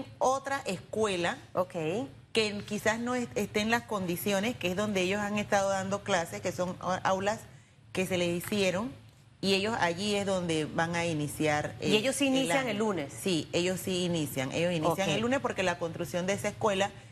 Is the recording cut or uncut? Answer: uncut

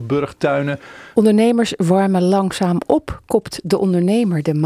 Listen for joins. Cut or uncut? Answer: cut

